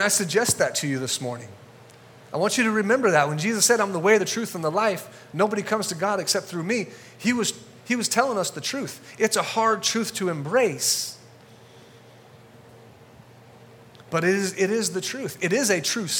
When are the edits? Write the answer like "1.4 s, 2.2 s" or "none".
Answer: none